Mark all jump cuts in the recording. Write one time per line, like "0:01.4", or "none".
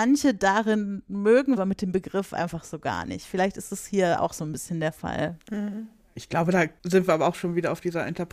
0:01.6

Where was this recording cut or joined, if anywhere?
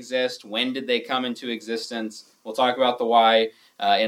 none

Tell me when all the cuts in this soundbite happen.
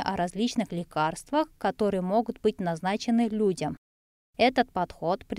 0:04.1

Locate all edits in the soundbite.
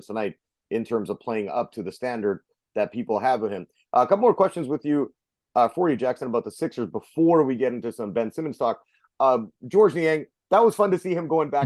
none

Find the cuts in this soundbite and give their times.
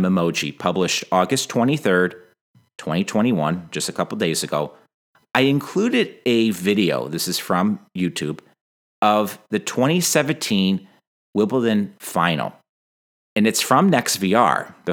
none

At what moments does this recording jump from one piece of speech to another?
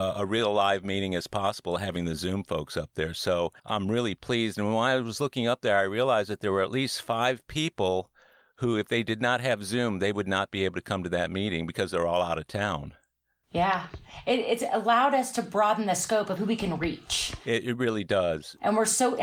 0:03.6

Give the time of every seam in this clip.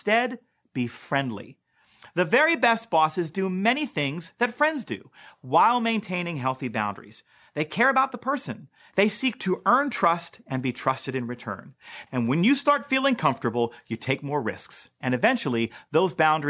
0:08.9
0:12.1

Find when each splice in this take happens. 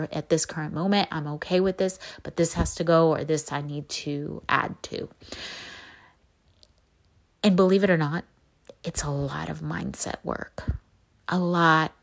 none

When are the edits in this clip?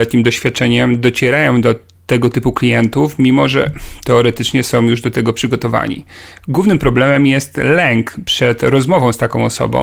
none

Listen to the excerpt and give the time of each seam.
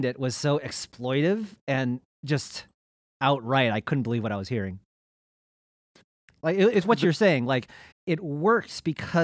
0:07.9

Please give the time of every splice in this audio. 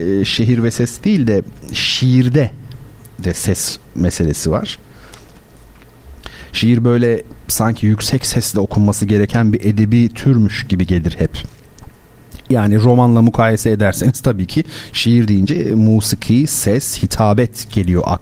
none

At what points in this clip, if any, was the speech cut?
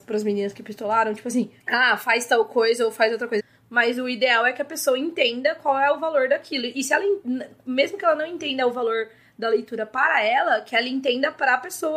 0:01.6
0:03.4

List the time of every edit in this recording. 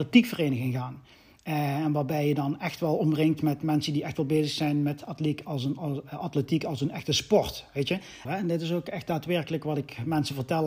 0:08.3

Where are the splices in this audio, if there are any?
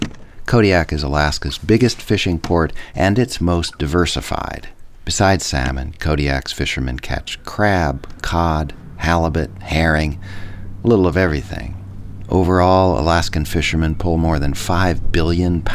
none

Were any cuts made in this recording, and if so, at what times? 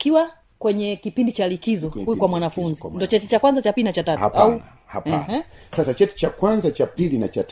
none

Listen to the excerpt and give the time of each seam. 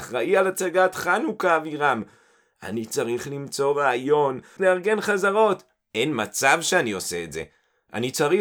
0:04.6

